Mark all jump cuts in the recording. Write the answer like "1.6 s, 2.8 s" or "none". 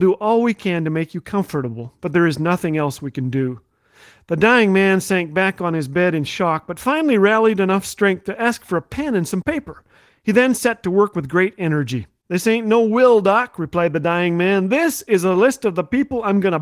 12.2 s

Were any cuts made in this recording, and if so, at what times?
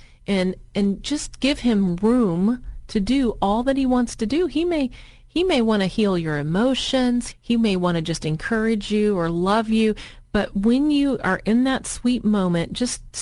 7.3 s

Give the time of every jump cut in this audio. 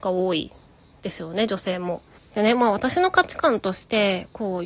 2.2 s

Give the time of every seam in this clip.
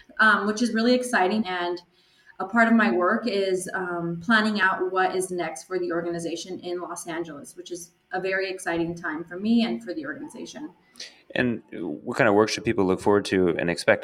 1.4 s

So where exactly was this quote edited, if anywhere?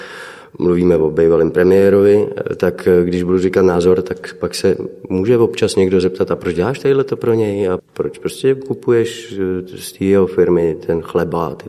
7.8 s

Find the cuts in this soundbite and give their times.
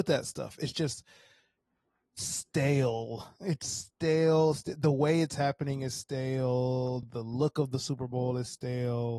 none

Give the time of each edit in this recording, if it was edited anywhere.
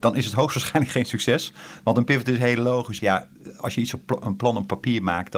3.0 s

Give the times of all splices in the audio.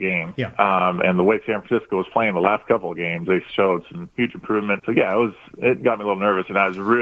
4.8 s

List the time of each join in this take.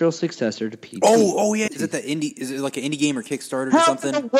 1.7 s

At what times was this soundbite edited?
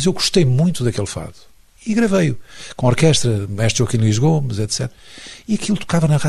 none

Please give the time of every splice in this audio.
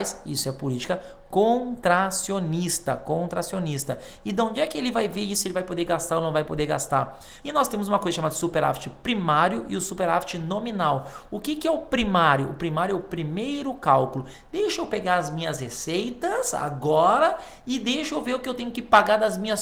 7.4 s

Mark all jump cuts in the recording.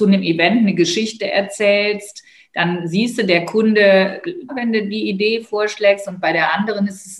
4.5 s

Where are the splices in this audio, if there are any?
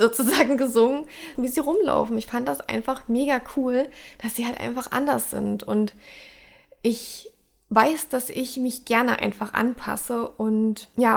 1.4 s

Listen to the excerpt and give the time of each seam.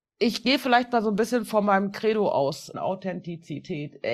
2.7 s

